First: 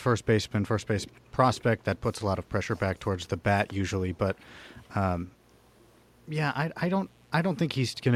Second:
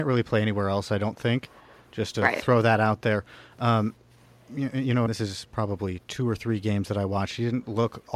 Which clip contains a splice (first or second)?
second